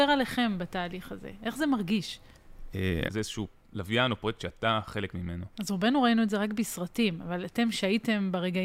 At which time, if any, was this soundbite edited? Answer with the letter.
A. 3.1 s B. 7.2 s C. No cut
A